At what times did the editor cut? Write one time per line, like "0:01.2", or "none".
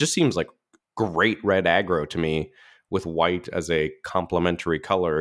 none